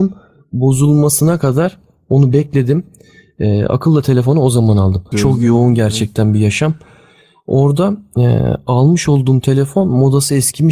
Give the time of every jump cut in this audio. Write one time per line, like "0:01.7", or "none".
0:05.1